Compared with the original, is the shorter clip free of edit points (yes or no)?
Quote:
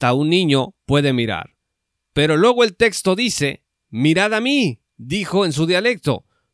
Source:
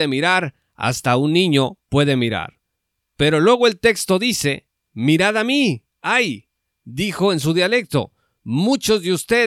no